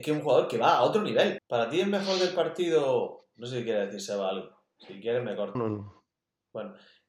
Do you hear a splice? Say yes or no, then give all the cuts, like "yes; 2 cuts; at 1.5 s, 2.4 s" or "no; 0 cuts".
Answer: yes; 2 cuts; at 1.4 s, 5.6 s